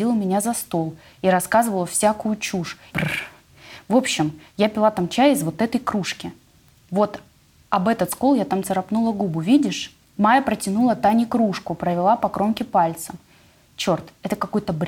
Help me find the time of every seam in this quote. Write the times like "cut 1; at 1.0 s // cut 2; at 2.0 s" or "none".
cut 1; at 2.9 s